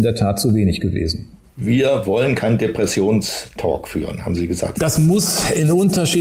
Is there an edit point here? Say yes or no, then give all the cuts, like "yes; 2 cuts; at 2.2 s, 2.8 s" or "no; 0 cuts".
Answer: yes; 1 cut; at 4.7 s